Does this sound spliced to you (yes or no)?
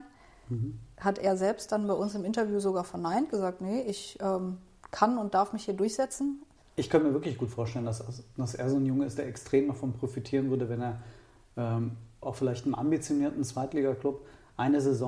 yes